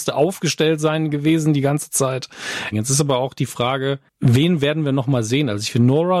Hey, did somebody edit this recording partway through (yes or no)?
yes